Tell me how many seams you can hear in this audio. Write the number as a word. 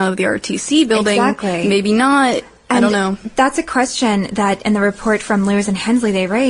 zero